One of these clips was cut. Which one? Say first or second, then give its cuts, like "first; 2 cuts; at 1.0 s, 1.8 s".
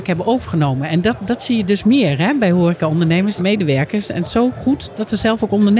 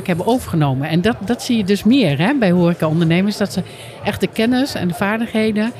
first; 1 cut; at 3.4 s